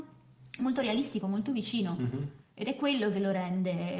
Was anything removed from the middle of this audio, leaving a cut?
yes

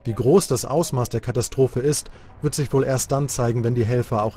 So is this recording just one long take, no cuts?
yes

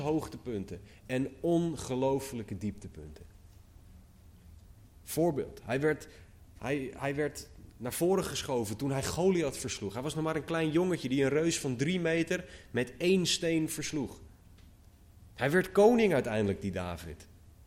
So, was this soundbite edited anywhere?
no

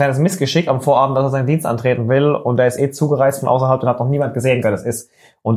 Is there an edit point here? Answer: yes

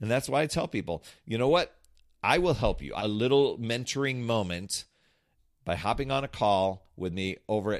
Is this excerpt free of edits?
no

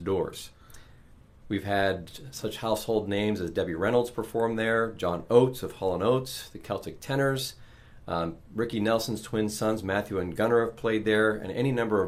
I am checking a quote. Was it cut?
no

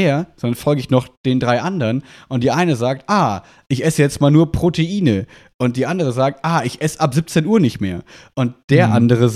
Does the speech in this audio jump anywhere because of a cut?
no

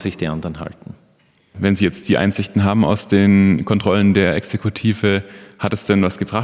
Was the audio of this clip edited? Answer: no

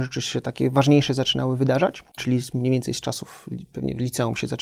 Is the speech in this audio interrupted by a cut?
yes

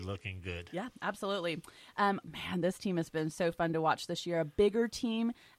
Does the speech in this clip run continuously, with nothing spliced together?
no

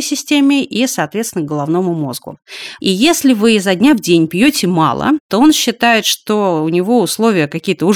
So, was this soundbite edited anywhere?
yes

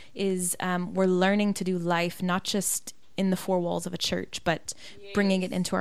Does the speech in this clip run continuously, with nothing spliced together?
yes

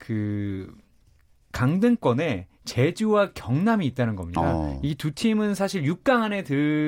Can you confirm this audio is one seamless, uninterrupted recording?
yes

